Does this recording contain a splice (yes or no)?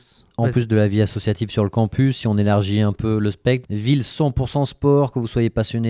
yes